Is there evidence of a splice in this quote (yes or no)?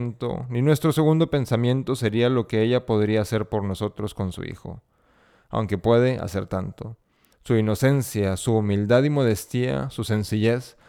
yes